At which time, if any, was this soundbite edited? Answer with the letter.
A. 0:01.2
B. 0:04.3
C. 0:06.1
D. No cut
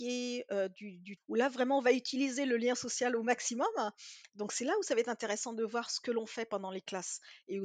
A